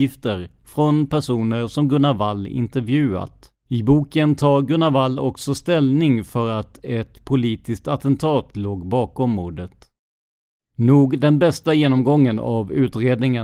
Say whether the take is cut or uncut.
cut